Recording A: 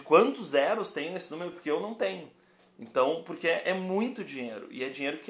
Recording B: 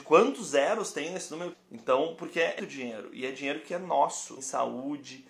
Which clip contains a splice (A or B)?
B